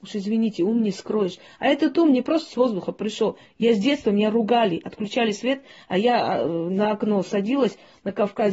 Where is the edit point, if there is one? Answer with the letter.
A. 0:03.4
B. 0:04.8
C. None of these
A